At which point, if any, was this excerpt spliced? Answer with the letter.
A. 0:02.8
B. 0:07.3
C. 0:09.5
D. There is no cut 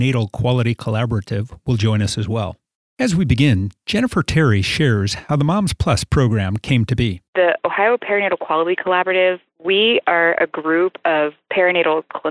D